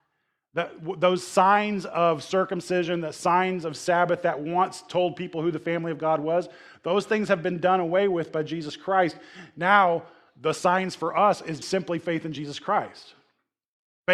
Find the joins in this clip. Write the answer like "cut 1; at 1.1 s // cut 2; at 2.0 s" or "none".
cut 1; at 11.6 s

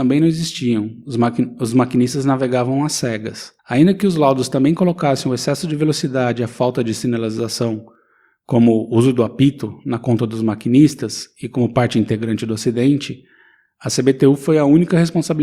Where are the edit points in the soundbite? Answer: cut 1; at 3.6 s

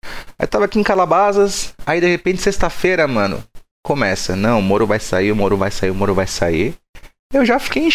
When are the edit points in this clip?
none

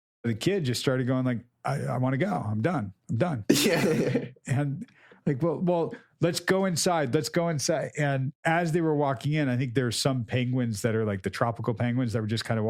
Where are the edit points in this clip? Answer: none

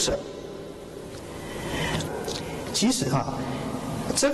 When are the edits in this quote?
cut 1; at 2.1 s

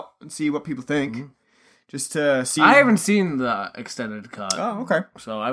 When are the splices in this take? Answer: none

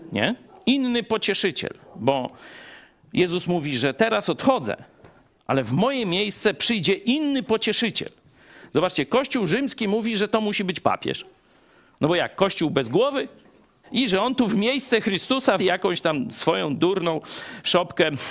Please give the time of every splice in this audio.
cut 1; at 13.8 s // cut 2; at 15.6 s

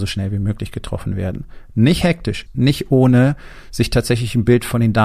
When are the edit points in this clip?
cut 1; at 2.5 s

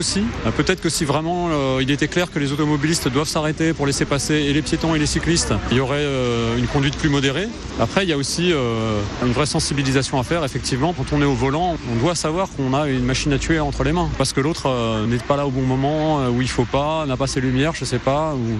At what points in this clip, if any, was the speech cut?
cut 1; at 14.2 s

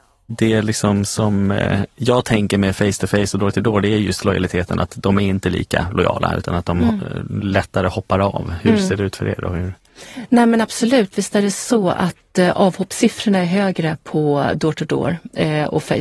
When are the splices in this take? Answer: none

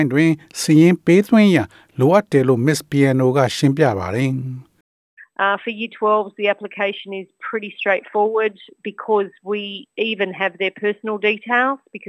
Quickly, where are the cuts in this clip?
none

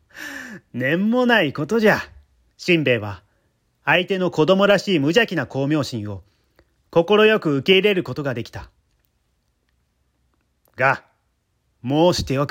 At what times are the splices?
cut 1; at 2.5 s

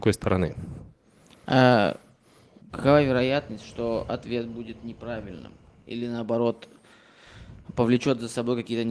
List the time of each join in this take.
none

